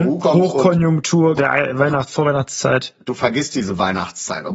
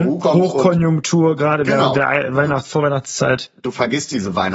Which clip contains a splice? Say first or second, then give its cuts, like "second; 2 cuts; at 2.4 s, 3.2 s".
first; 1 cut; at 1.4 s